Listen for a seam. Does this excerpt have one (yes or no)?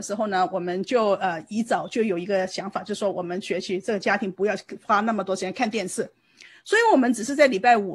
no